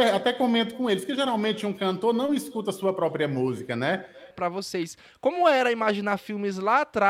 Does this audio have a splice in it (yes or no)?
yes